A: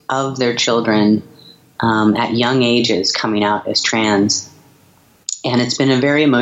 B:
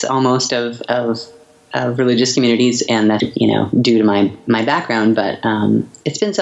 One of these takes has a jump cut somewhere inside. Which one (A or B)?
B